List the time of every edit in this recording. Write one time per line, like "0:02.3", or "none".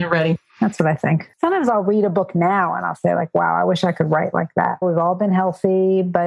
0:04.8